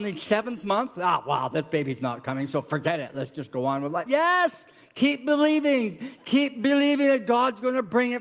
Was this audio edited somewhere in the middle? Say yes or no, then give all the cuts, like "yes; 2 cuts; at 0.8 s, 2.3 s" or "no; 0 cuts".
yes; 1 cut; at 4.1 s